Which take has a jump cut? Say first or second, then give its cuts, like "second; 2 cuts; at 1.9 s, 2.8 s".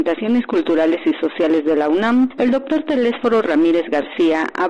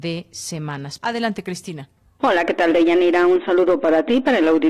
second; 1 cut; at 1.0 s